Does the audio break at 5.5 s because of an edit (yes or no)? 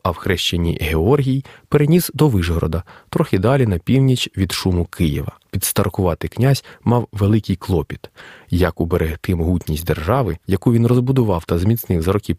yes